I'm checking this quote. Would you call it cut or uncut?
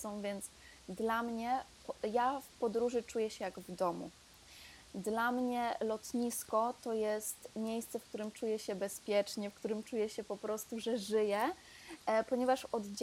uncut